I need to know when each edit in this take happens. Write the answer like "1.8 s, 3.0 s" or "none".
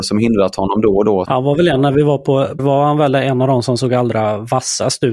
1.2 s, 2.6 s